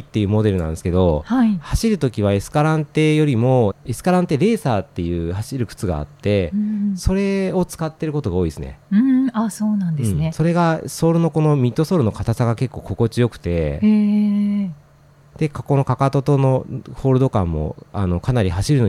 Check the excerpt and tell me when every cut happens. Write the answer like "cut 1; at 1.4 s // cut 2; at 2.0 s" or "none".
cut 1; at 3.7 s